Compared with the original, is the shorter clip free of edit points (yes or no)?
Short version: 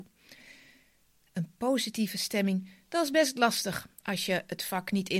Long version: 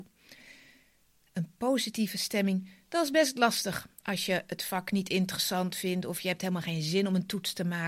yes